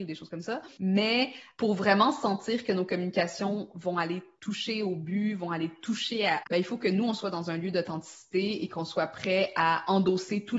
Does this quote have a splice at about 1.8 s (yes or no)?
no